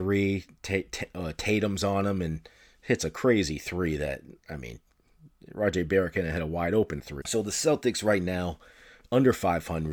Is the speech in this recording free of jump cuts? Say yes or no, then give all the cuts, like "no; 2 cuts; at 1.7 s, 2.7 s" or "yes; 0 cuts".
no; 1 cut; at 7.2 s